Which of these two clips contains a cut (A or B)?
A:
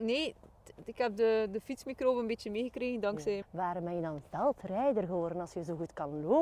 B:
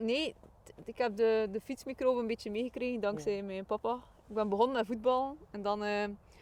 A